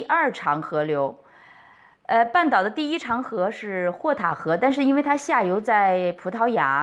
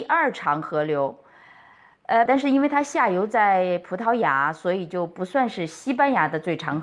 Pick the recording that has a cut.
second; 1 cut; at 2.3 s

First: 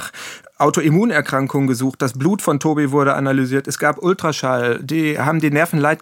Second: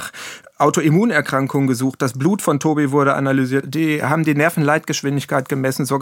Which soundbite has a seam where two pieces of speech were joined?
second; 1 cut; at 3.6 s

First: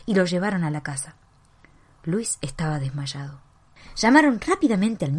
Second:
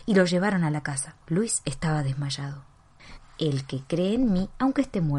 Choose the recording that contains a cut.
second; 2 cuts; at 1.2 s, 3.2 s

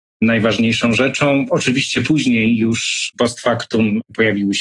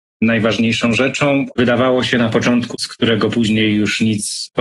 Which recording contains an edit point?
second; 2 cuts; at 1.5 s, 2.7 s

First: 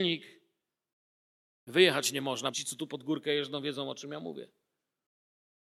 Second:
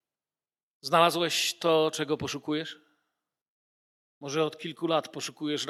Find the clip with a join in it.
first; 1 cut; at 2.5 s

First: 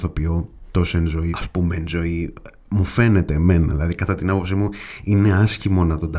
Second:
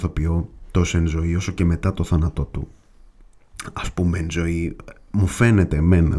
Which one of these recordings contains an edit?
first; 1 cut; at 1.3 s

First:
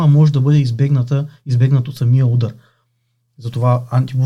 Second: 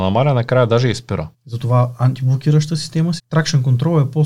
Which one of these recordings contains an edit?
second; 2 cuts; at 1.3 s, 3.2 s

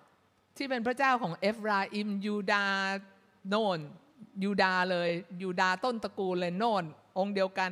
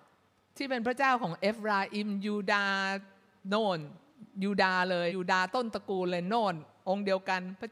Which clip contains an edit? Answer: second; 1 cut; at 5.1 s

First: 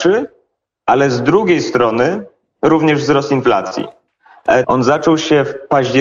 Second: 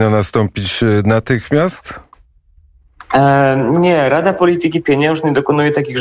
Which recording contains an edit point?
first; 1 cut; at 4.6 s

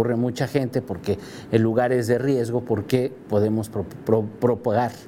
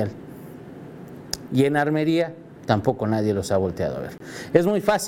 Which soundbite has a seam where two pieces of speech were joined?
second; 1 cut; at 1.5 s

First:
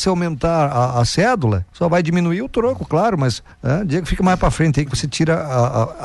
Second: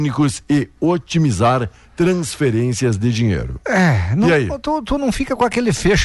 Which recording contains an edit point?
first; 2 cuts; at 1.7 s, 3.5 s

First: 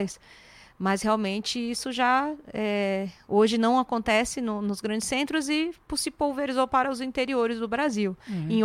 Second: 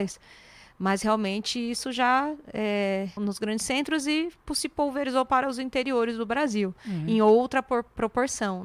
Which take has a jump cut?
second; 1 cut; at 3.2 s

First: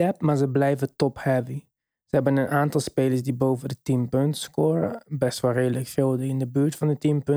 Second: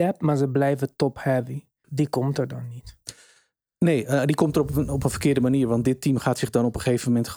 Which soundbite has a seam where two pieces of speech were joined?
second; 1 cut; at 1.8 s

